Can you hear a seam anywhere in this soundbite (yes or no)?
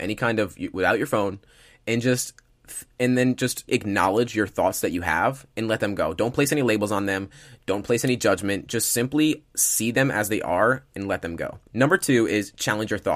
yes